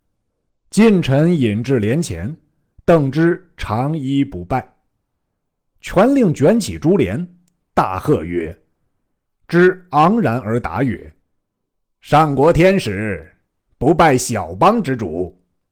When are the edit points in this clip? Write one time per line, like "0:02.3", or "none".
0:09.3
0:11.2